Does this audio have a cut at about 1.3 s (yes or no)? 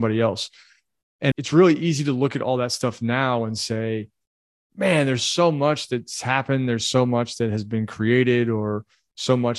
yes